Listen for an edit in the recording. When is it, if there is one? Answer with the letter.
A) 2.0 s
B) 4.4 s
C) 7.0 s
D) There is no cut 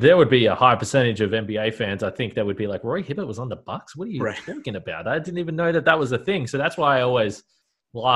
D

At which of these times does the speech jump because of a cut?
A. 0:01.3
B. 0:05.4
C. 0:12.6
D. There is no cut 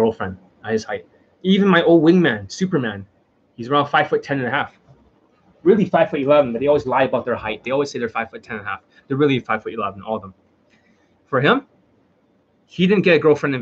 A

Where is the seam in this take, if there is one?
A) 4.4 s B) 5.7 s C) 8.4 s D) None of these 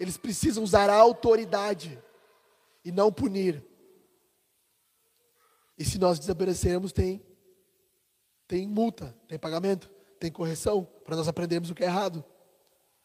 B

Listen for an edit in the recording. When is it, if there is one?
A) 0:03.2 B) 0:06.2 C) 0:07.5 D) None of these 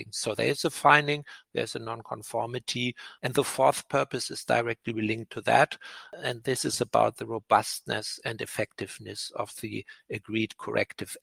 A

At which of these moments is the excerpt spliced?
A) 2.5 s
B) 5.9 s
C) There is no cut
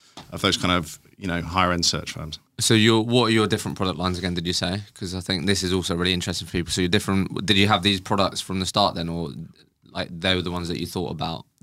A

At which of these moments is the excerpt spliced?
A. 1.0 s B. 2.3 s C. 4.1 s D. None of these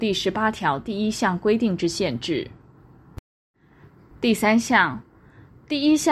C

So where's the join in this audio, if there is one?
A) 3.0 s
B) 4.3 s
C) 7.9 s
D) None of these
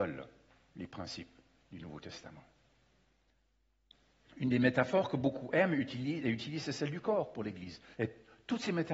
C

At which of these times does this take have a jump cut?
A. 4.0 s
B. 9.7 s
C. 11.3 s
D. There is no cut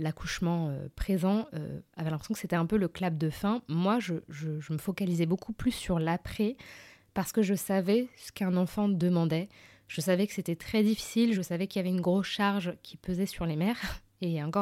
C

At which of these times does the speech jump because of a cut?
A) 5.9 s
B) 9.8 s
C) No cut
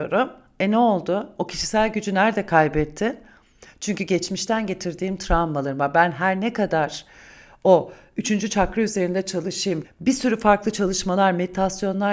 B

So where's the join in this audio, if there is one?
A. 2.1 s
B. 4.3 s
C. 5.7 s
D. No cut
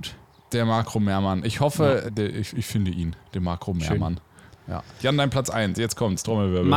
A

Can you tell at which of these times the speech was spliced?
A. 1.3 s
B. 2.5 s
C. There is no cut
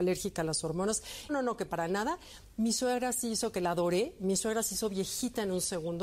A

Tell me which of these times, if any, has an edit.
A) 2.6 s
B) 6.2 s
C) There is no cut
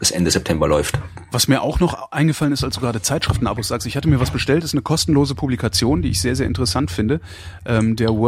C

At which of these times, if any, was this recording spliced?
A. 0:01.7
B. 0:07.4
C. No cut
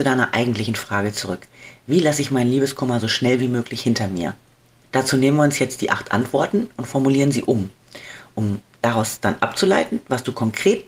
C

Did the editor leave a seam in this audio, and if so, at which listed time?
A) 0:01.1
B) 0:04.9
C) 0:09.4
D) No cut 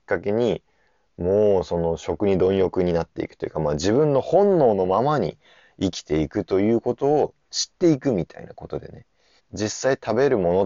C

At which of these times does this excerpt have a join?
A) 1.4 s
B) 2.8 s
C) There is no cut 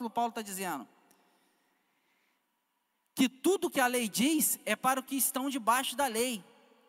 C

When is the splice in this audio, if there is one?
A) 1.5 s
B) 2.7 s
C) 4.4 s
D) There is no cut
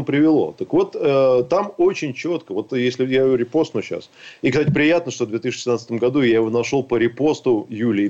B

